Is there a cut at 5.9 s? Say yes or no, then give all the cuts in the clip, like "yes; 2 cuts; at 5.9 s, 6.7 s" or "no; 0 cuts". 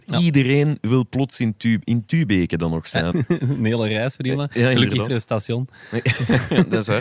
no; 1 cut; at 3.1 s